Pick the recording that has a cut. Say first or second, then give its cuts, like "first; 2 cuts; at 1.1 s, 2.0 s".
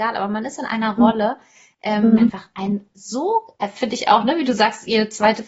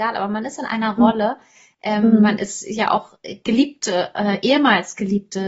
first; 1 cut; at 2.2 s